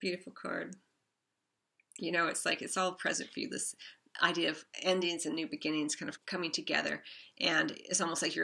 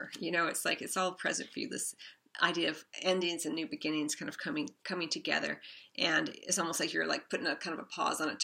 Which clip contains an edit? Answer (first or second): first